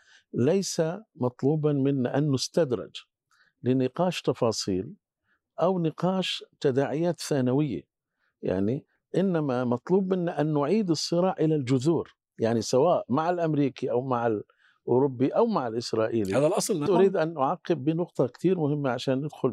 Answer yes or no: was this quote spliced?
yes